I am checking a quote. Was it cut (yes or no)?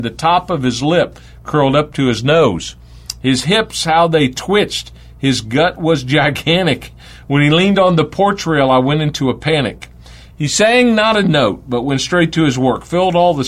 no